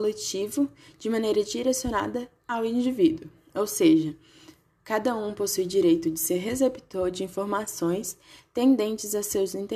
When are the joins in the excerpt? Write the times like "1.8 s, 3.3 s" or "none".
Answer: none

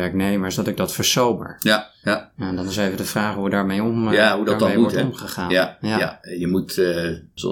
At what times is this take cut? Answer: 2.0 s

